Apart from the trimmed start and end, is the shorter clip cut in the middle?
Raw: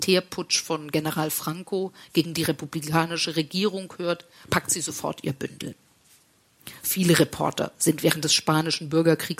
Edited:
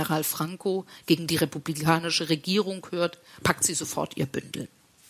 no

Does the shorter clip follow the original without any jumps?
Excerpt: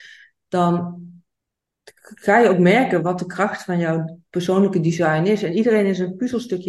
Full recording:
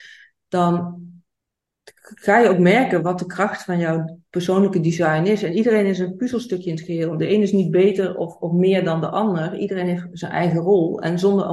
yes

